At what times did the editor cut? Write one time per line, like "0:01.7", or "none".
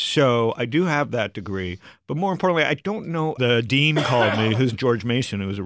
0:03.4
0:04.7